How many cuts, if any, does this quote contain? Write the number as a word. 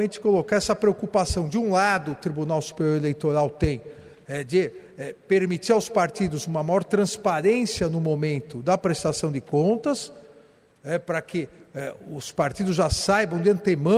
zero